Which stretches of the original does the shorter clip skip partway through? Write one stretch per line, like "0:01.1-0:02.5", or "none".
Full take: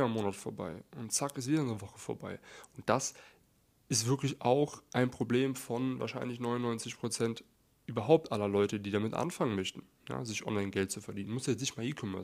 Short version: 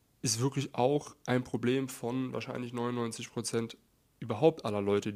none